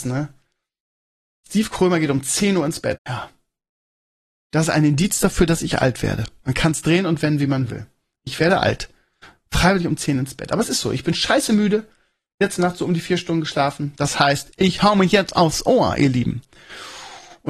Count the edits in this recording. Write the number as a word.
one